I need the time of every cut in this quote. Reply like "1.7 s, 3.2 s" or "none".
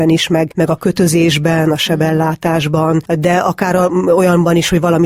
none